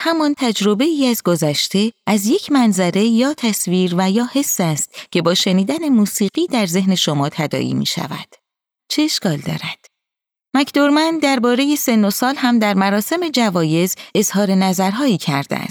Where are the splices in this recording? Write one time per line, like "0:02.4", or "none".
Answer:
0:08.8
0:10.5